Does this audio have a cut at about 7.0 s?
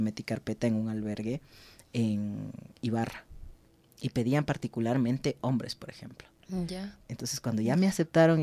yes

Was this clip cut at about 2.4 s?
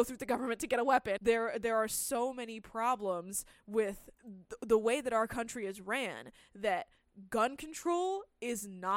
no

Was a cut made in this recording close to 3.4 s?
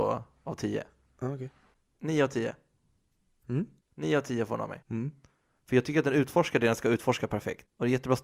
no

